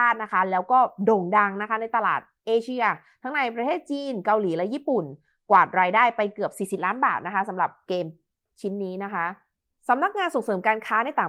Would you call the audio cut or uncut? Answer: uncut